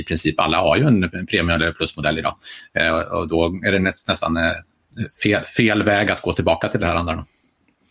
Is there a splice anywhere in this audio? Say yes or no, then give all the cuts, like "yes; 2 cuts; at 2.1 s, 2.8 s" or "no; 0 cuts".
no; 0 cuts